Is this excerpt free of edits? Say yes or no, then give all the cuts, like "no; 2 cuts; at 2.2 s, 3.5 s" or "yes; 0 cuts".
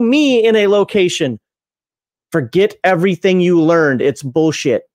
yes; 0 cuts